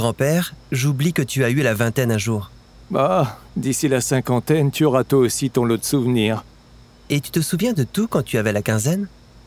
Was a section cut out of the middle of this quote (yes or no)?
yes